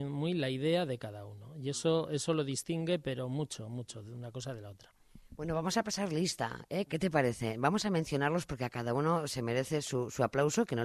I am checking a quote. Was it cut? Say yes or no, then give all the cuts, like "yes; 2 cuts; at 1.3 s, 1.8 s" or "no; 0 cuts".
yes; 1 cut; at 6.9 s